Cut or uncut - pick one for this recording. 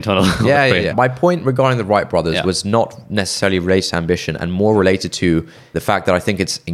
cut